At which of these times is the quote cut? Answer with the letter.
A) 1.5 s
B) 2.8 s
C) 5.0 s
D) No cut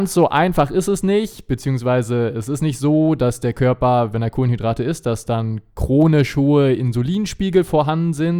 D